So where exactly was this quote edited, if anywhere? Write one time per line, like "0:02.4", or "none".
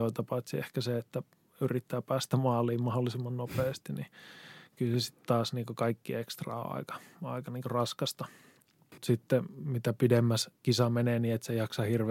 none